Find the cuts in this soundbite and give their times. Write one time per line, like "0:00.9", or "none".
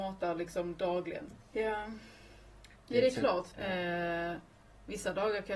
0:01.3
0:03.5